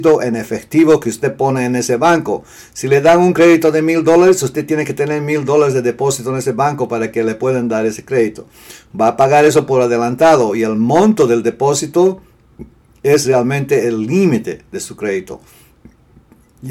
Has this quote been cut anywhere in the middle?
no; 0 cuts

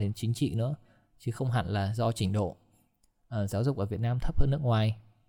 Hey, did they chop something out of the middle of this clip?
no; 0 cuts

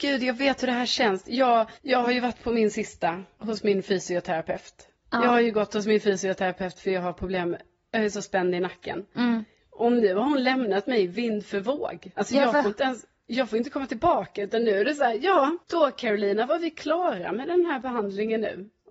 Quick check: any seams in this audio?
yes; 2 cuts; at 1.8 s, 15.6 s

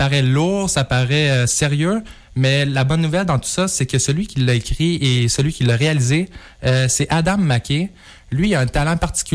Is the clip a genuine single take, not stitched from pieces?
yes; 0 cuts

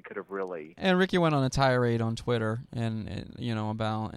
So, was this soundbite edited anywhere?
no; 0 cuts

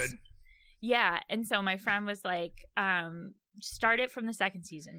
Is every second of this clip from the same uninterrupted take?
yes; 0 cuts

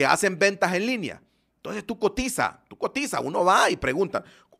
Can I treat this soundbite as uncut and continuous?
yes; 0 cuts

